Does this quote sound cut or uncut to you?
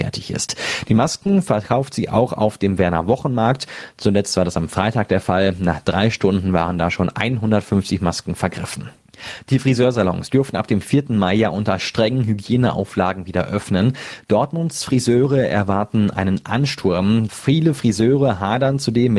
cut